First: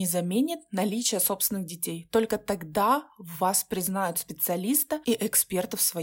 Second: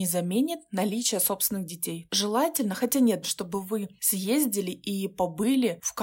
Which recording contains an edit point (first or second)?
second